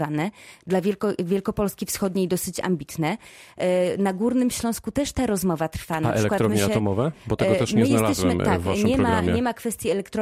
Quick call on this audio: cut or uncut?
uncut